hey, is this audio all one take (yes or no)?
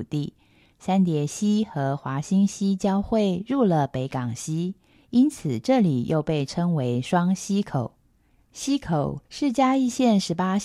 yes